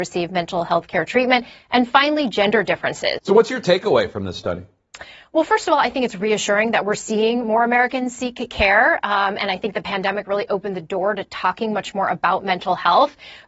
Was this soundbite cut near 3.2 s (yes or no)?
yes